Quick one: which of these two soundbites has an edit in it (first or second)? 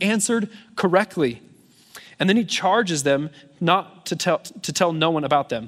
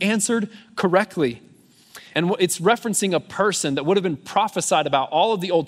second